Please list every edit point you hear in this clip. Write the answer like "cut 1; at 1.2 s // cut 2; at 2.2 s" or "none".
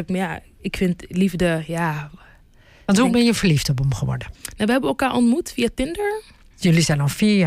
cut 1; at 4.3 s // cut 2; at 6.5 s